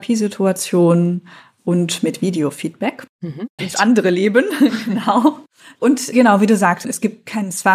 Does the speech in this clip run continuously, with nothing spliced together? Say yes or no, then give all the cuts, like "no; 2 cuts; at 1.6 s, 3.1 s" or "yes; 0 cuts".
no; 1 cut; at 3.6 s